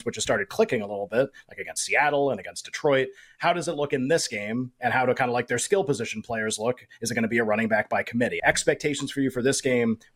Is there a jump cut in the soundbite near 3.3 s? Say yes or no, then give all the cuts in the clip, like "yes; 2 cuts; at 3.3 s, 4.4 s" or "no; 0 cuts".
no; 1 cut; at 8.4 s